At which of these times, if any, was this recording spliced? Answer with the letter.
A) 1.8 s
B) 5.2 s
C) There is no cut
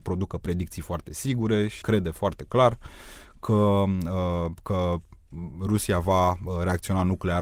A